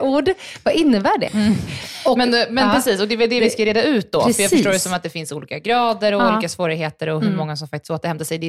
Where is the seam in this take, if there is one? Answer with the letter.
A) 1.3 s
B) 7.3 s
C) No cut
A